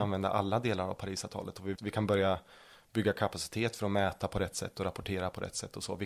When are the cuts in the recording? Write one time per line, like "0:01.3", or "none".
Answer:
0:01.8